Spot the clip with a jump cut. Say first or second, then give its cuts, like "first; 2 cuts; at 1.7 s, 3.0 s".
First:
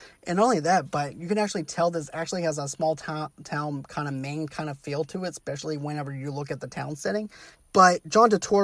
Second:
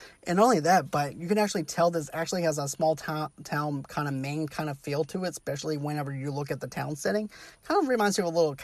first; 1 cut; at 7.6 s